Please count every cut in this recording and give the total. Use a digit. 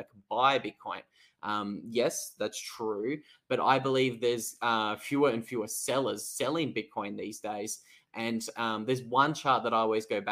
0